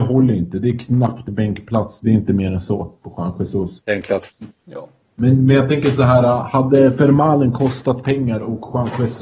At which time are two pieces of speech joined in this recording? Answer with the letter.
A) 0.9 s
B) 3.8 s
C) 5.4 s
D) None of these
B